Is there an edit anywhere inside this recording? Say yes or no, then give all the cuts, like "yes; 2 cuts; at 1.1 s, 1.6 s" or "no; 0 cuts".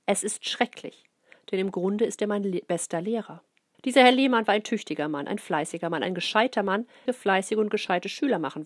yes; 2 cuts; at 3.7 s, 7.1 s